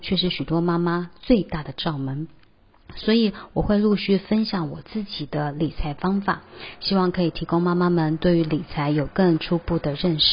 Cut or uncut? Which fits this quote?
uncut